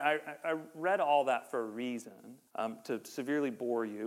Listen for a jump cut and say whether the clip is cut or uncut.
cut